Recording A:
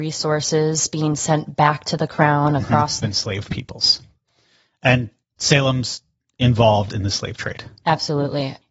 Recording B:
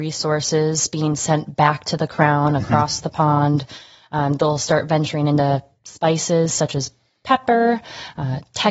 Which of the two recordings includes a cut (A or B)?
A